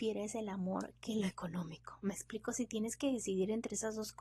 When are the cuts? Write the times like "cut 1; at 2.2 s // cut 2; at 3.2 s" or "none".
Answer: none